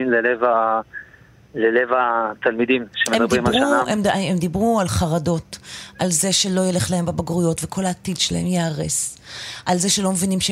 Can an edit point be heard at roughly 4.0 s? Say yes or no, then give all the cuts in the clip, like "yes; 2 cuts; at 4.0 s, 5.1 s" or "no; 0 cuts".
no; 0 cuts